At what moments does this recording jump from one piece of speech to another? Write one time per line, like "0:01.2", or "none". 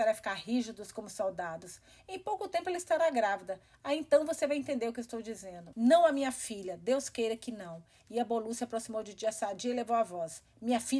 0:05.7